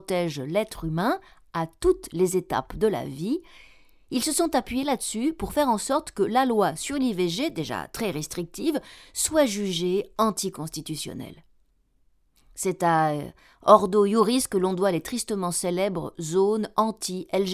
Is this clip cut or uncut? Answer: uncut